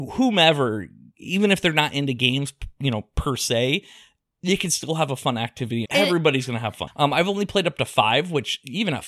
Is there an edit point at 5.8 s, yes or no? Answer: yes